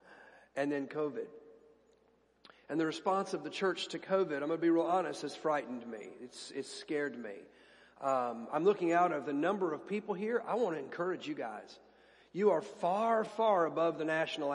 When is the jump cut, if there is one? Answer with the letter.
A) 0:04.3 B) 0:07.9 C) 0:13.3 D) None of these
C